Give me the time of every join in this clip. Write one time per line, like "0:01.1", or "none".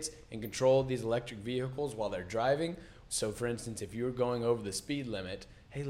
0:03.1